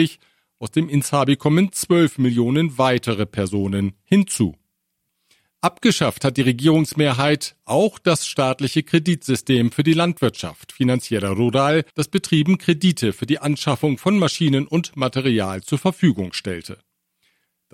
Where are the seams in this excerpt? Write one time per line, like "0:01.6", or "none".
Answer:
0:11.9

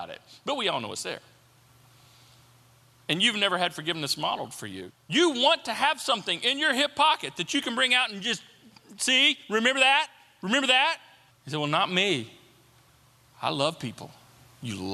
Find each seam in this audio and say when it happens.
0:04.9
0:11.3

